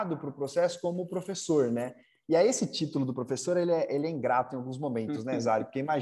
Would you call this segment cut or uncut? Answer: uncut